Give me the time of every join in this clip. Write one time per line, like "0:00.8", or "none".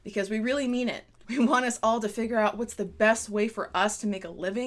0:01.2